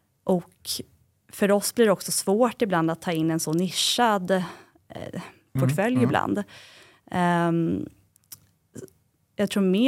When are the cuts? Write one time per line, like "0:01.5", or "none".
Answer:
0:05.6